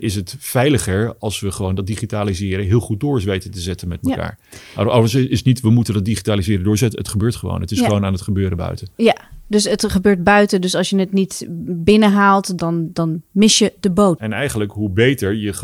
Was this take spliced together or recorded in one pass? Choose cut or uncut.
cut